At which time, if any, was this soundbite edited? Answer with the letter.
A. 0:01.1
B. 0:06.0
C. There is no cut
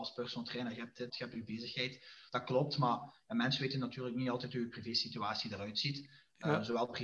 A